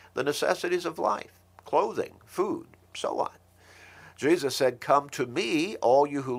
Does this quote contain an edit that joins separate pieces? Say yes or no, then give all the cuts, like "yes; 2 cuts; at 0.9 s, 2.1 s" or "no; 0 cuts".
no; 0 cuts